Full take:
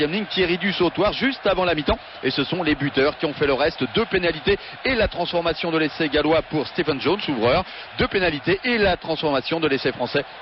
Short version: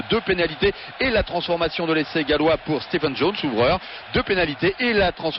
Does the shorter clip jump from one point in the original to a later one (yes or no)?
no